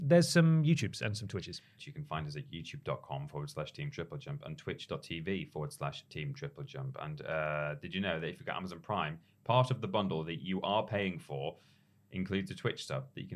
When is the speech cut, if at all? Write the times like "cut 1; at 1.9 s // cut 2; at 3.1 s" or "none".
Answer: cut 1; at 1.8 s